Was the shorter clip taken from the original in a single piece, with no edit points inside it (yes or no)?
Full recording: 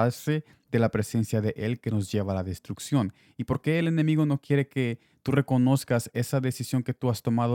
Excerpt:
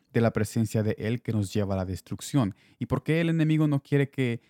yes